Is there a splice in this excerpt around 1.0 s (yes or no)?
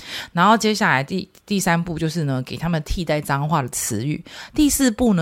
no